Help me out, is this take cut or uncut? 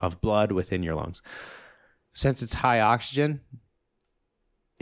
uncut